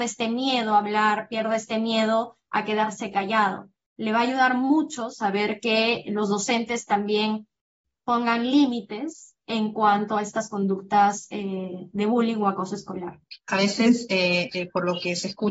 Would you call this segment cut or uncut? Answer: uncut